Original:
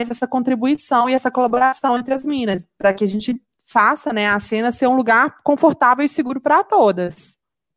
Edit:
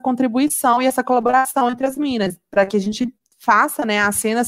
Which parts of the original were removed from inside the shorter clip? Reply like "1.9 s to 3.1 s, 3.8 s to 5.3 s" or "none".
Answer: none